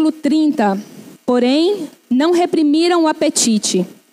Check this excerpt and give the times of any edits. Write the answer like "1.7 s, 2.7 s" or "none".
1.2 s